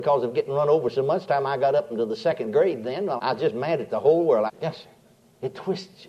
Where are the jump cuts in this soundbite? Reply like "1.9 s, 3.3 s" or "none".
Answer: 3.2 s, 4.5 s